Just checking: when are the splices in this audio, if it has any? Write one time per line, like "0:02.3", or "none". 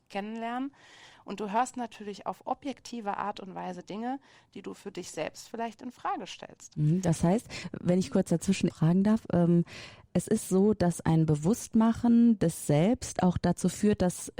0:08.7